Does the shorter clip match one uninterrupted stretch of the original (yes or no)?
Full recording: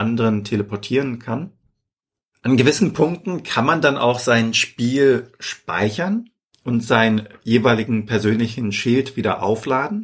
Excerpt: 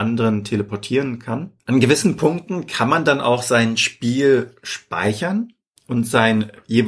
no